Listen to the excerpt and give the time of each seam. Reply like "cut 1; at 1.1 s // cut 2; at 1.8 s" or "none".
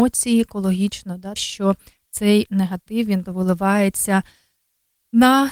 cut 1; at 1.4 s // cut 2; at 3.2 s